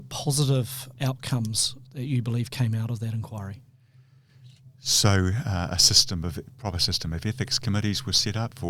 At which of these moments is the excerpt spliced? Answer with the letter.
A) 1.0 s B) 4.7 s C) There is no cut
A